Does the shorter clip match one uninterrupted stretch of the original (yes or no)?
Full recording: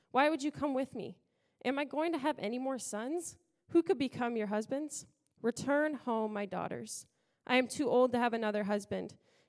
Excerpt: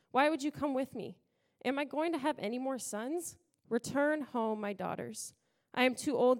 no